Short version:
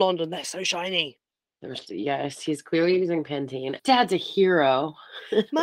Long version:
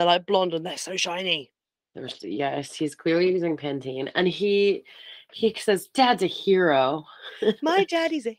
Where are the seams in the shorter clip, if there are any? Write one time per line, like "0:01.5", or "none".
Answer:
0:03.8